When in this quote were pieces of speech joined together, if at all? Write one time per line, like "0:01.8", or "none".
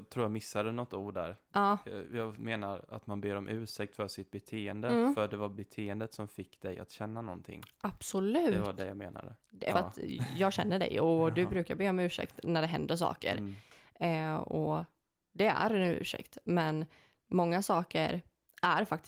0:09.7

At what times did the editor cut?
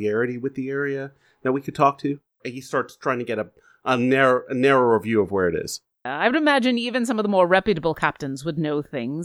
0:02.4
0:06.1

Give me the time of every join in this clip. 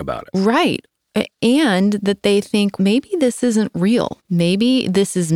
0:02.8
0:04.2

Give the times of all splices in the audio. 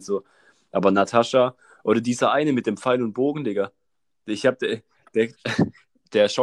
0:05.3

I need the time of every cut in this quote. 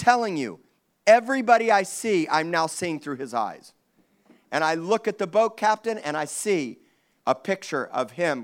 none

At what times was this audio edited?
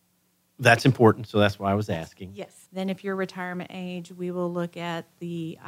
0:02.7

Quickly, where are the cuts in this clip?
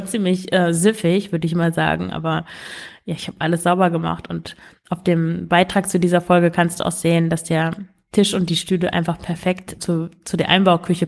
0:09.8

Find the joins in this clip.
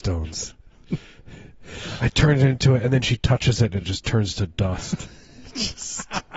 none

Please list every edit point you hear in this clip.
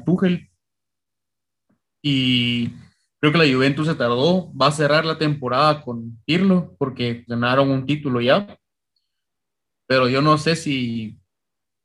0:07.3

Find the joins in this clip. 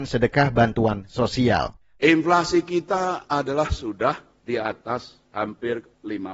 0:01.9

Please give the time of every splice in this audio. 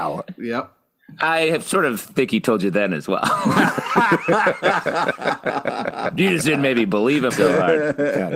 0:07.3

